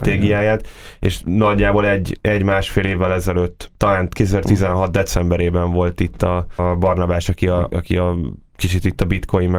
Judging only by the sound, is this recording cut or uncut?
cut